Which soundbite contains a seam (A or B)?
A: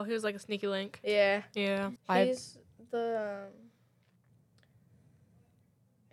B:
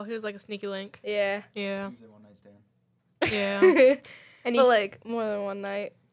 A